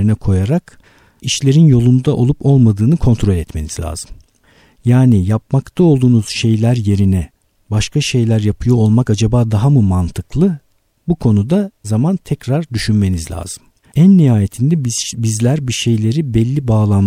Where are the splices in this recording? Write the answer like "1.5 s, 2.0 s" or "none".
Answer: 11.8 s, 13.8 s